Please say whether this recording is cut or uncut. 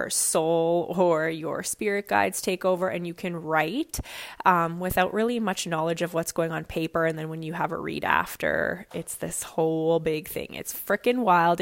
uncut